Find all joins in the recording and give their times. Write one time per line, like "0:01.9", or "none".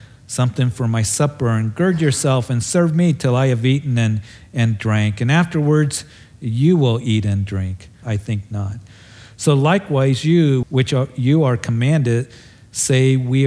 0:08.0
0:10.6